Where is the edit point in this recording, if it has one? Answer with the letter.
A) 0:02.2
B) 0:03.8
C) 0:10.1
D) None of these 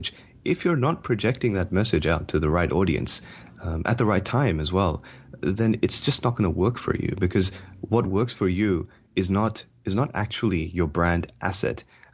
D